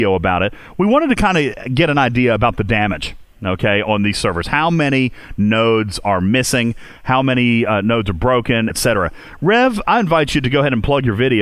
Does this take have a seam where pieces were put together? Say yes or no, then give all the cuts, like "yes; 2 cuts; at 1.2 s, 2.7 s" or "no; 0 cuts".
yes; 2 cuts; at 8.7 s, 9.9 s